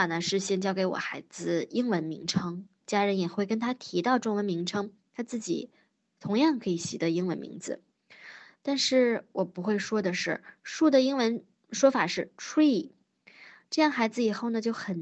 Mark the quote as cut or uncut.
cut